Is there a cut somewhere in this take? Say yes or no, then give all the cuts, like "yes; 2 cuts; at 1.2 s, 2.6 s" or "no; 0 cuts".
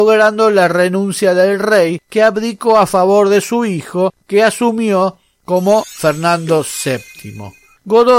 no; 0 cuts